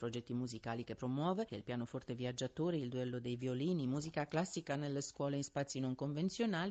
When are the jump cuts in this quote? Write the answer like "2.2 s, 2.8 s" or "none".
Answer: 1.5 s